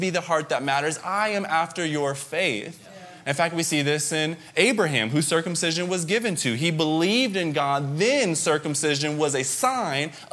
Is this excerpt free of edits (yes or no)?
yes